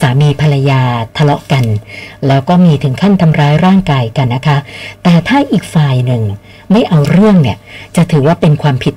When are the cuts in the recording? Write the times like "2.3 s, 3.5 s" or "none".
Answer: 4.3 s